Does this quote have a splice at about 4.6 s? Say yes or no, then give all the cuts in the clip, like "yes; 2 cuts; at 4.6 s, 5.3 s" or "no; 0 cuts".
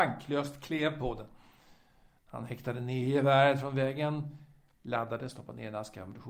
no; 1 cut; at 2.2 s